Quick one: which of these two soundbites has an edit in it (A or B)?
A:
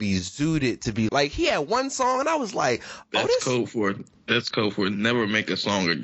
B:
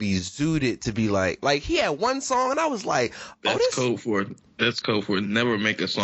A